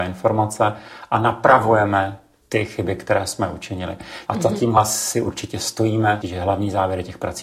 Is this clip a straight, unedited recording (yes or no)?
no